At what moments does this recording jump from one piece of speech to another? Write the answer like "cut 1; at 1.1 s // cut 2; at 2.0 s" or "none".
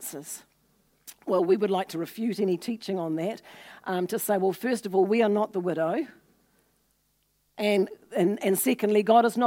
none